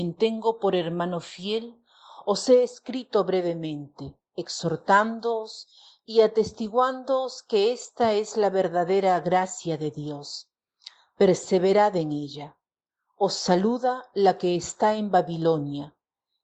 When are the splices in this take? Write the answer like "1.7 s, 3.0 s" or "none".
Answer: none